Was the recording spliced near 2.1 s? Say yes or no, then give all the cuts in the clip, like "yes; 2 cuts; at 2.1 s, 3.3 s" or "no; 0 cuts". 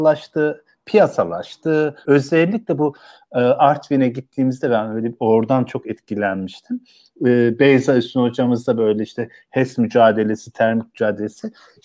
yes; 1 cut; at 2.1 s